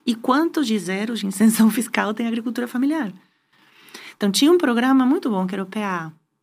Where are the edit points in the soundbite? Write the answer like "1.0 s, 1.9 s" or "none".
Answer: none